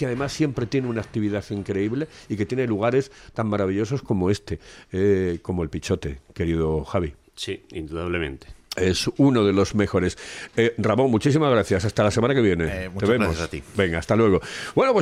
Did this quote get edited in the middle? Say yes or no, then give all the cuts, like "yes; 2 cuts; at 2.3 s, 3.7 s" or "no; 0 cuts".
no; 0 cuts